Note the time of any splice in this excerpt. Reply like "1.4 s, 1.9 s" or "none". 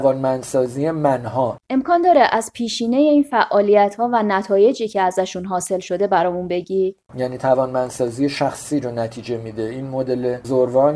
1.6 s, 7.1 s